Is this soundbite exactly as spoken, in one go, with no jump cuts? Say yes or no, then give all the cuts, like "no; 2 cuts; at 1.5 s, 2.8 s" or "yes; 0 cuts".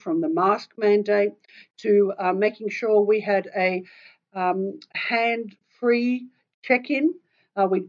yes; 0 cuts